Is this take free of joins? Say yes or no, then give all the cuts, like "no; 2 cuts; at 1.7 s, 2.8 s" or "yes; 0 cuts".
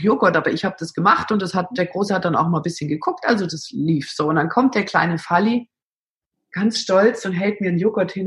yes; 0 cuts